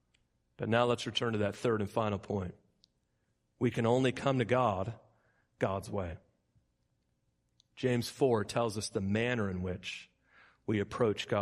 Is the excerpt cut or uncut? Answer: uncut